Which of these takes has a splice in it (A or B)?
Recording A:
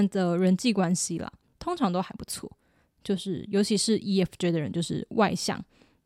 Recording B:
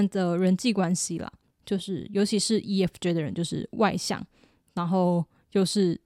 B